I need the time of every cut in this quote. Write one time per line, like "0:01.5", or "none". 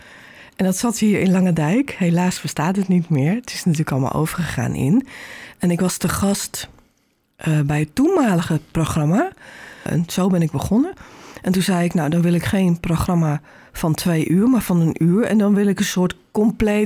0:09.9